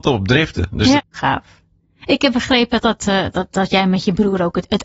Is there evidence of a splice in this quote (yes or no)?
yes